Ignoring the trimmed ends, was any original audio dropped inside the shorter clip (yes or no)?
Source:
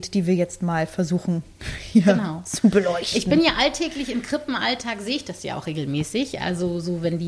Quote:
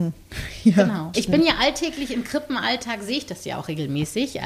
yes